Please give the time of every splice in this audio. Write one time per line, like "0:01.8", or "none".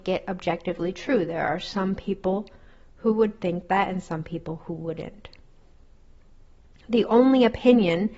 none

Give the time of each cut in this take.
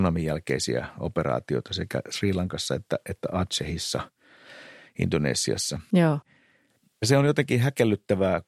none

